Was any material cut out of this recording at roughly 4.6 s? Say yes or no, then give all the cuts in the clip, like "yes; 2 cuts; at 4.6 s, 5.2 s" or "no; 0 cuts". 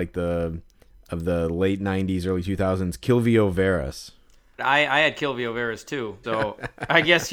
yes; 2 cuts; at 4.6 s, 6.2 s